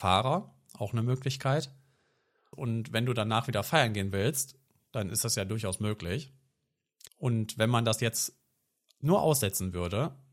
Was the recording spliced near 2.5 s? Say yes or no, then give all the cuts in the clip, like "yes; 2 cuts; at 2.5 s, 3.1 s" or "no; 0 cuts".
yes; 2 cuts; at 2.5 s, 7.1 s